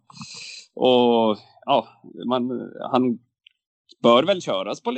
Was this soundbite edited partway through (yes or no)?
no